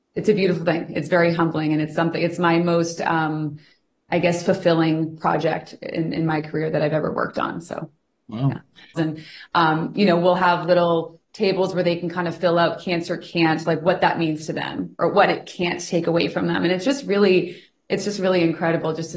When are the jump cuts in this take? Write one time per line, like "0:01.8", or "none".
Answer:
0:09.0